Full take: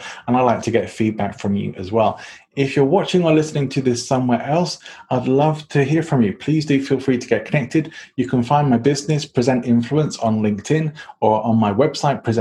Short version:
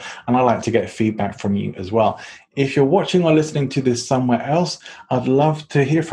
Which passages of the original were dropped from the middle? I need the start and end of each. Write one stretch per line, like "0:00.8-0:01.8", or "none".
none